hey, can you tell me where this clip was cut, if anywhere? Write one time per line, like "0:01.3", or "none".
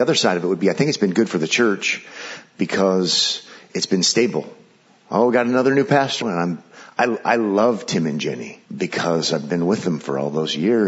0:06.2
0:08.7